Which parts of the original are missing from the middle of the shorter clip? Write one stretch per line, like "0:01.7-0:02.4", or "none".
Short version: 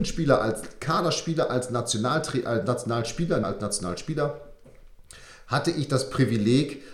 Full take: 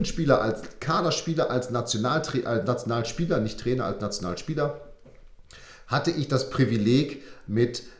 0:03.4-0:03.8